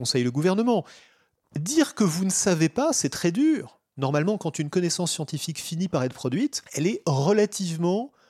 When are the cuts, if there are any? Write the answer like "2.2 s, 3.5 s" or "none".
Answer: none